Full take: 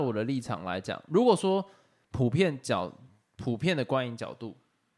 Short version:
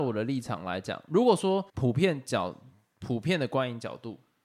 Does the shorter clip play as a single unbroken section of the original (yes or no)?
no